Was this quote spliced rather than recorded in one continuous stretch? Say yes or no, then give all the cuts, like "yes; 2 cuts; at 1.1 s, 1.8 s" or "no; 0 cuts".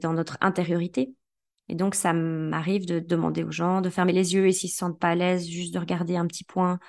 no; 0 cuts